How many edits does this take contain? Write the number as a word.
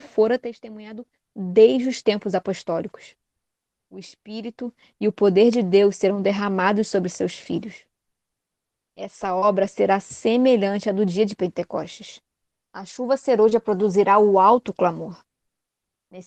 one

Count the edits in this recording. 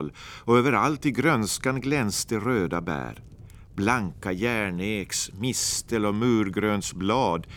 zero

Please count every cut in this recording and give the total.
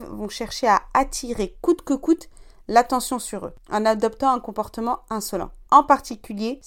one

